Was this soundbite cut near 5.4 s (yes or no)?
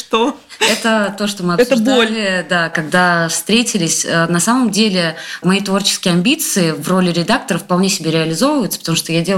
yes